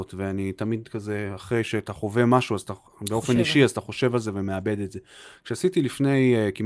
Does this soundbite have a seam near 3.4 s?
no; 0 cuts

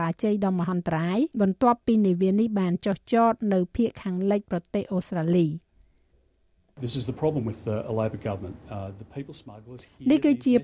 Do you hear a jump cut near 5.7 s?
no; 1 cut; at 1.3 s

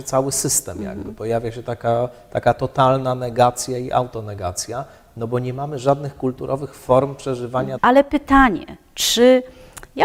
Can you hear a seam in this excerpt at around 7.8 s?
yes; 1 cut; at 7.8 s

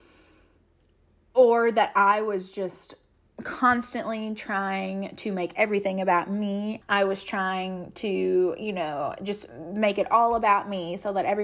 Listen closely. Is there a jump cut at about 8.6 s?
no; 1 cut; at 6.8 s

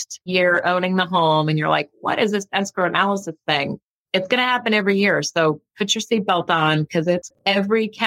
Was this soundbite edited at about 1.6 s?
no; 0 cuts

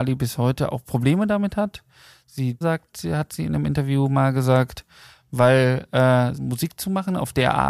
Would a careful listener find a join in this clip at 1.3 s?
no; 2 cuts; at 2.6 s, 6.4 s

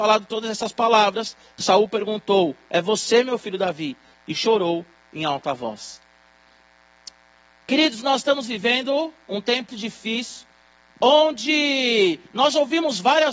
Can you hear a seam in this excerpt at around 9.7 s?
yes; 1 cut; at 9.7 s

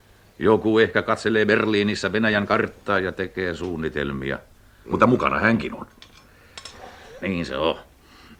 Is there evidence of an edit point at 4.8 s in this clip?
yes; 2 cuts; at 4.8 s, 7.2 s

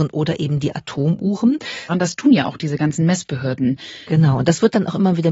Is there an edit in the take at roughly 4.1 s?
yes; 2 cuts; at 1.9 s, 4.1 s

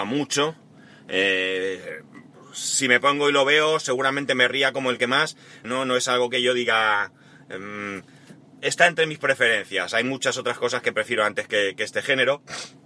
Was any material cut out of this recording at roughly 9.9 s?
no; 1 cut; at 5.6 s

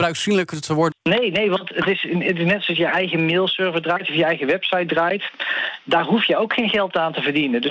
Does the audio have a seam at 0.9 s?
yes; 1 cut; at 0.9 s

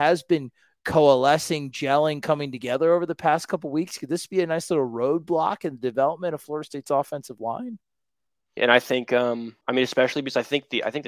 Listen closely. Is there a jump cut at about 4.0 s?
no; 2 cuts; at 8.6 s, 9.6 s

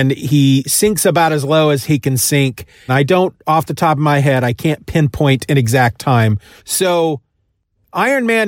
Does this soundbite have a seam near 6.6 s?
yes; 2 cuts; at 2.9 s, 6.6 s

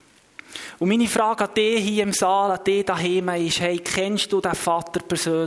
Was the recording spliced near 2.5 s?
no; 0 cuts

